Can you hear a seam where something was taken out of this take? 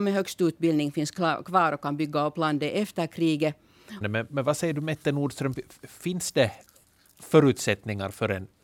yes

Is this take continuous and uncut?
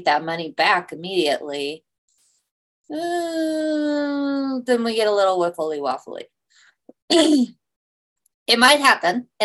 yes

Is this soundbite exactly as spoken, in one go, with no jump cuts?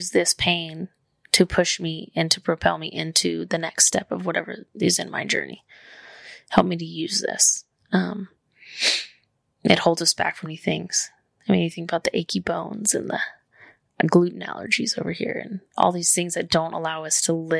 no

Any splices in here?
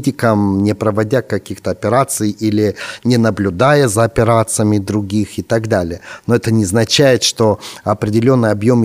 no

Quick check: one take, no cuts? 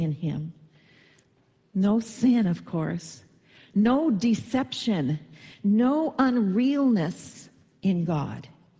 yes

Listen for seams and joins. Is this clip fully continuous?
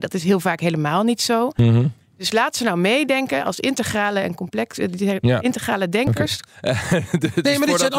no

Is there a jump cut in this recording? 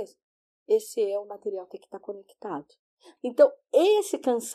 yes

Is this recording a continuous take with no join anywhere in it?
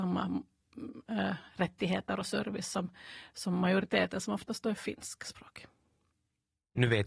yes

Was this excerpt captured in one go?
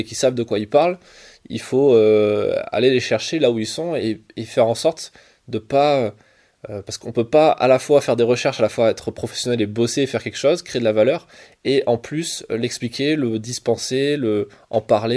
yes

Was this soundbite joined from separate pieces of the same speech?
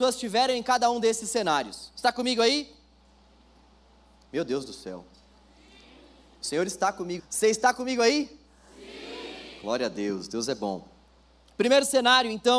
yes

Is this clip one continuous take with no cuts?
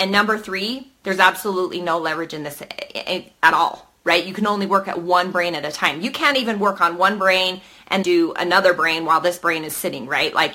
no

